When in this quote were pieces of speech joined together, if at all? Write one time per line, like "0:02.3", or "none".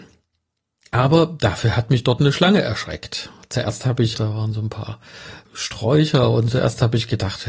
0:04.1
0:05.4